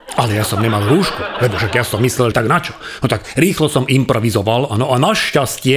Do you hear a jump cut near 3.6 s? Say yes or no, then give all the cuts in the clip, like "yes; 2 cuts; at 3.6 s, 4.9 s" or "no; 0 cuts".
no; 1 cut; at 2.3 s